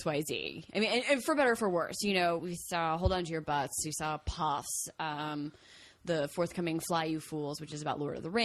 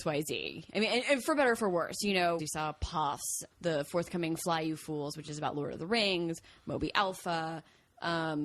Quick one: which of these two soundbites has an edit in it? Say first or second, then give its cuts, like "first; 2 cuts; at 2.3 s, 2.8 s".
second; 2 cuts; at 2.4 s, 3.5 s